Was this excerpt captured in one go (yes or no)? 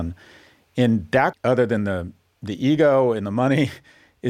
no